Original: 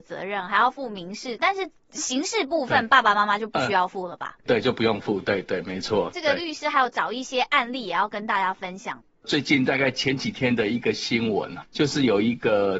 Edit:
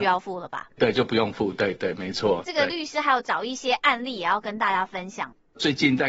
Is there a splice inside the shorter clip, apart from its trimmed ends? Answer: no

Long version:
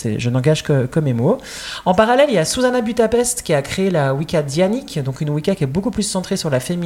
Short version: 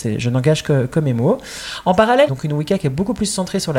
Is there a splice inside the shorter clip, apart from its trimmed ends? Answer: yes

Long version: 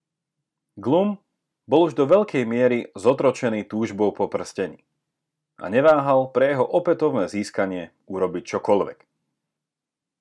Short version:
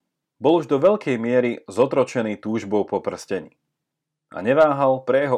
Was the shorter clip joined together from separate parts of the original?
no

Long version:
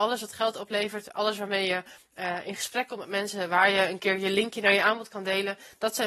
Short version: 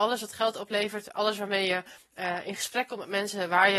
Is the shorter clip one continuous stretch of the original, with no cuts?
yes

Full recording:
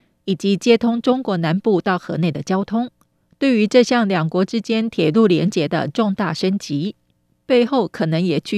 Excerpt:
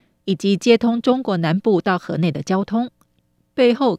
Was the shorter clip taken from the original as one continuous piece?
no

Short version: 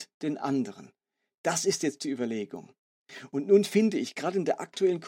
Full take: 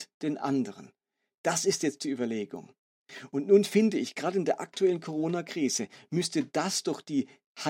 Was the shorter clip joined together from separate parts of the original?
no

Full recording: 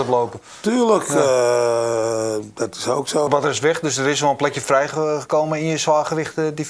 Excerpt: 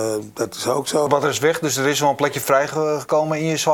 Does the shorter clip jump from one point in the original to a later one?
no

